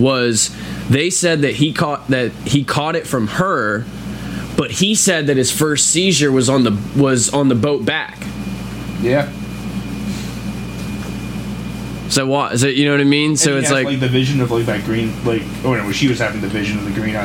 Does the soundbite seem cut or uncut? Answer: uncut